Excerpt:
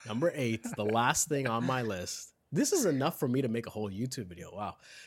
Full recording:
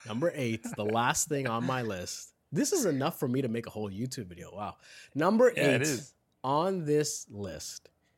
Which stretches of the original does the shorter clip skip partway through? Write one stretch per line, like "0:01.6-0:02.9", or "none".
none